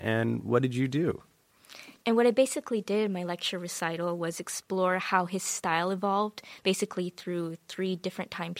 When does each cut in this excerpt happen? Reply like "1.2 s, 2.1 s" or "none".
2.0 s